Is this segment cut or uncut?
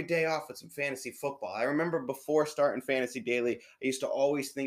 uncut